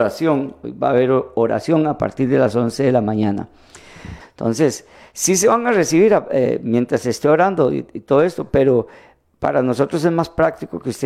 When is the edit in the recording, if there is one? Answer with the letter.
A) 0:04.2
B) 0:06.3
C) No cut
A